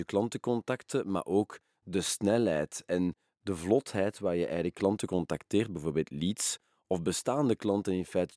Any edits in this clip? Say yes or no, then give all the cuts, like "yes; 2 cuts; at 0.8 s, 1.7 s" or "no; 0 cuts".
no; 0 cuts